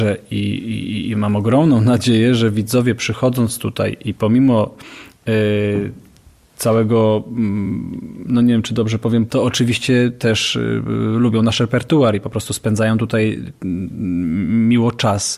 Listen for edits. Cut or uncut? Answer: cut